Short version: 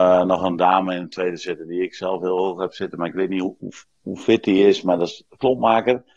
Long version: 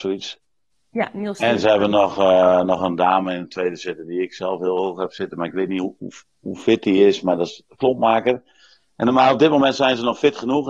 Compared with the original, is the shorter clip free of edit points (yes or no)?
yes